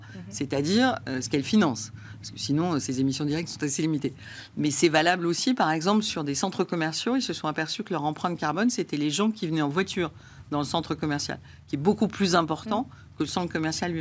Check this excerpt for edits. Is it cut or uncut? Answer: uncut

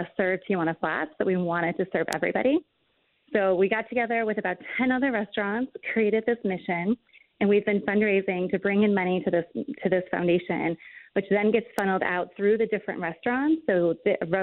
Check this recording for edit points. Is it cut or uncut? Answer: uncut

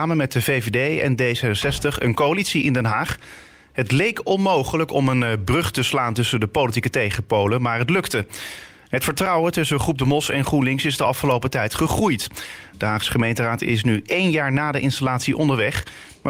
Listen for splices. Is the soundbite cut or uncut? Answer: uncut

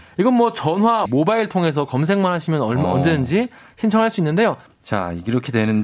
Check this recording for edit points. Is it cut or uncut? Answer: cut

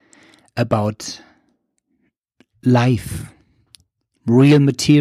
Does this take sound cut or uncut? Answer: uncut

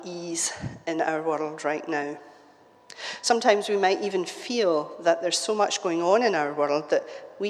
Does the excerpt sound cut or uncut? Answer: uncut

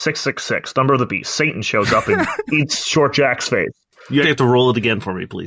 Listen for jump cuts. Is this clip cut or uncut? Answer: cut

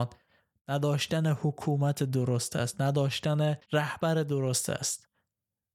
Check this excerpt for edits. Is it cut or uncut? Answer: cut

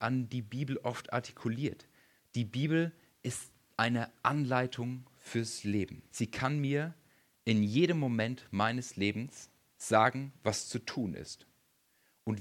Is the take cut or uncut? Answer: cut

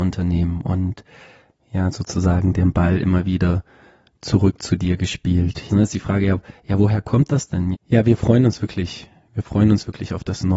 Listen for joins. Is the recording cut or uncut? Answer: cut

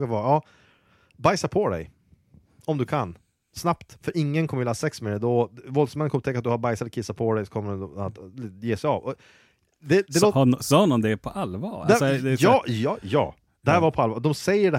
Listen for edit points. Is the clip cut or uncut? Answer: uncut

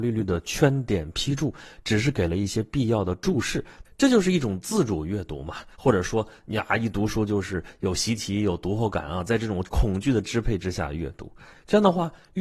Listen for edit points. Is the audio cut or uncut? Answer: cut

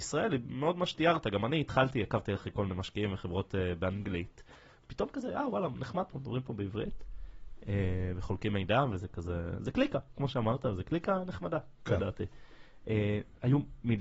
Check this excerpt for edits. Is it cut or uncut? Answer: uncut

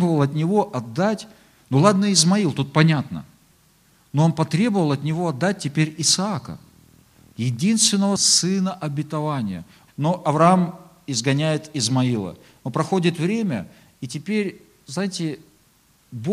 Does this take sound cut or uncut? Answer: cut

